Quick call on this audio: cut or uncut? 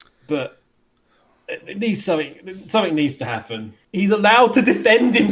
cut